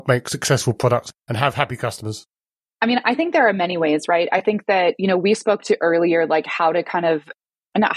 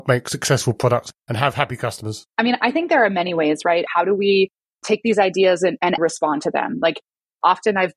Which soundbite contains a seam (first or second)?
second